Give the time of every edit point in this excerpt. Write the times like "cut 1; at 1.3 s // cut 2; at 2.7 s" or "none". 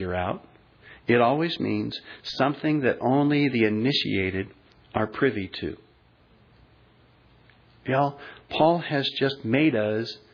none